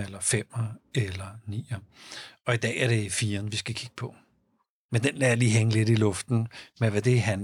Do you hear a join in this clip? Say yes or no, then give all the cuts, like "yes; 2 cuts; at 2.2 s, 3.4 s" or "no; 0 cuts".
yes; 1 cut; at 4.9 s